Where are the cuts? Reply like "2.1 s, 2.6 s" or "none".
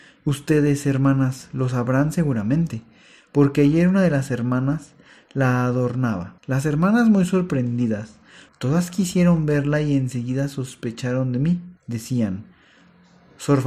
6.4 s, 8.5 s, 11.8 s

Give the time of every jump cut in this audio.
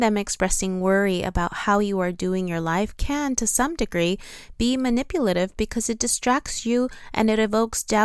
none

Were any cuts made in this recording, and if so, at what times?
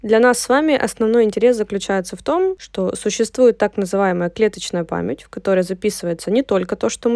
none

